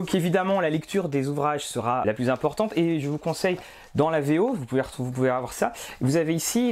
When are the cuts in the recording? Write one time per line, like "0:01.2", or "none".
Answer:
0:02.0